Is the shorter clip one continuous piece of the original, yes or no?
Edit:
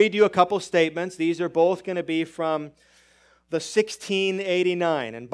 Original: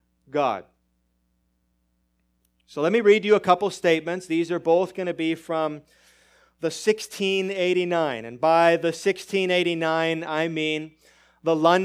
yes